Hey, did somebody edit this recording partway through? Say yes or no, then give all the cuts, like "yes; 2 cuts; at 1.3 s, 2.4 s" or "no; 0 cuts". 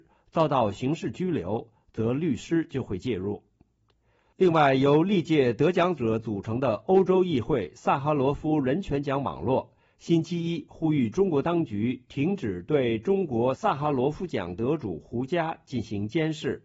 no; 0 cuts